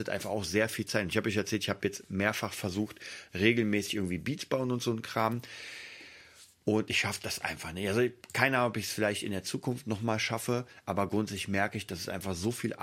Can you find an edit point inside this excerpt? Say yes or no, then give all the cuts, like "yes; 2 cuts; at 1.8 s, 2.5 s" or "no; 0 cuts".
yes; 1 cut; at 3.3 s